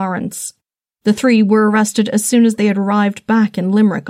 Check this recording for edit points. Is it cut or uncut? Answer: uncut